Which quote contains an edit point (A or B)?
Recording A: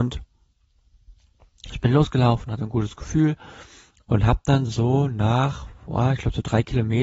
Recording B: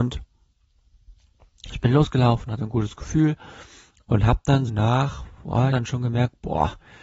B